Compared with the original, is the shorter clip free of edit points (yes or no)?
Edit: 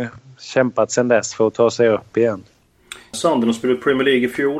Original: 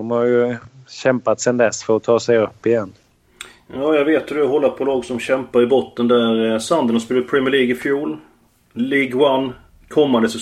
no